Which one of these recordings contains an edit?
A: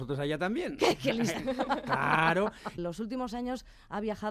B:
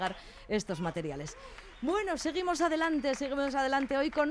A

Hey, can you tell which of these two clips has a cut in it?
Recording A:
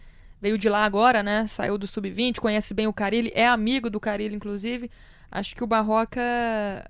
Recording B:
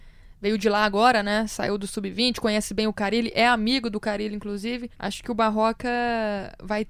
B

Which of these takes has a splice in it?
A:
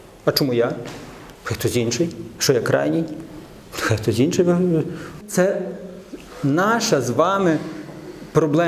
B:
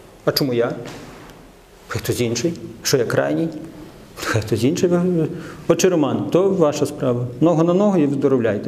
A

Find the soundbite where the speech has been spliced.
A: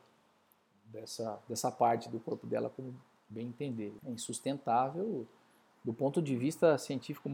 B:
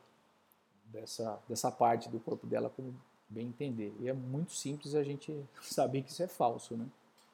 A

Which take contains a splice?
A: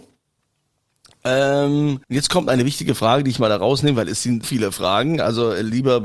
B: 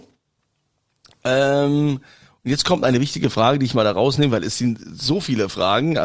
A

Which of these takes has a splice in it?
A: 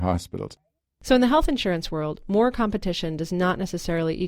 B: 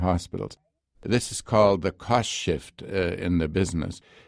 B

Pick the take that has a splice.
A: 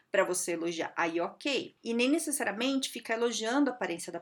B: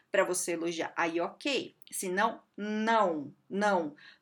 A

